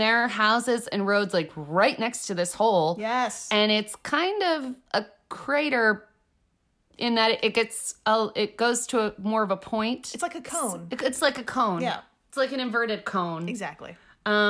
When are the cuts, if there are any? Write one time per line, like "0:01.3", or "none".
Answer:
none